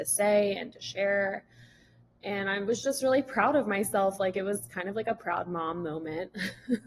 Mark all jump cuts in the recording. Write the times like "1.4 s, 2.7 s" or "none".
none

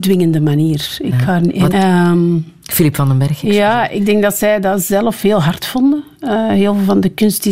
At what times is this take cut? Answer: 1.7 s

